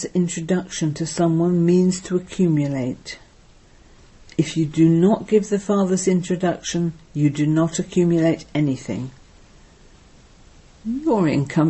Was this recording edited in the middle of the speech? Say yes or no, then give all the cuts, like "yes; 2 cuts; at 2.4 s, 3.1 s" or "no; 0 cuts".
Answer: no; 0 cuts